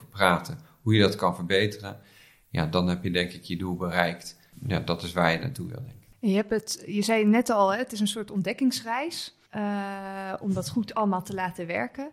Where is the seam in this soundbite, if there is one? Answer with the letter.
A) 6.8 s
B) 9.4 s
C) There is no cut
B